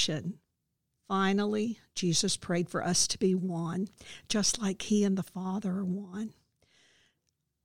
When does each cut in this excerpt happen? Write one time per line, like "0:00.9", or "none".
0:00.9